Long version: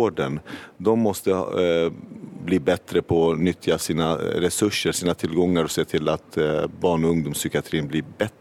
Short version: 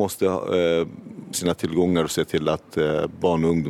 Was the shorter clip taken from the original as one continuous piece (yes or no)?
no